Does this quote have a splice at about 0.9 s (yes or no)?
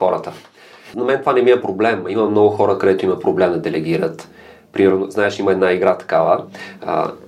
yes